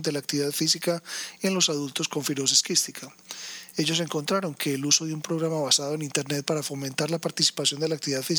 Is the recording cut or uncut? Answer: uncut